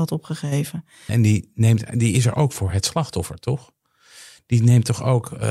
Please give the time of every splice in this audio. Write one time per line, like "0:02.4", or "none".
0:01.1

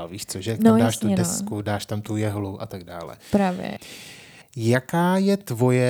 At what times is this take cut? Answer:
none

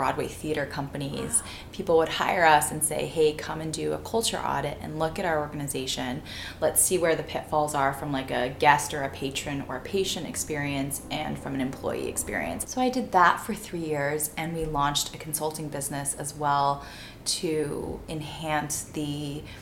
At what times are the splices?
0:12.6

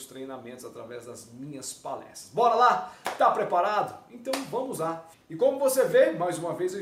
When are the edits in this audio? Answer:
0:05.1

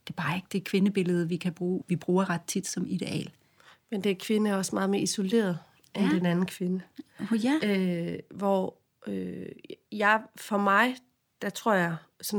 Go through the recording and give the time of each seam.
0:01.8

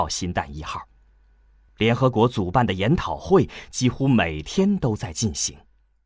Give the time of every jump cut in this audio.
none

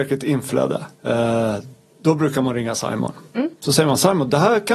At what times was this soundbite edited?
0:00.9

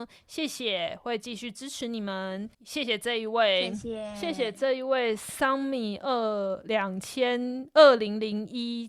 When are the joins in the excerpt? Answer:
0:02.5

